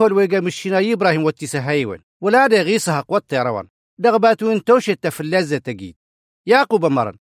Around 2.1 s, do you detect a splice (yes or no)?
yes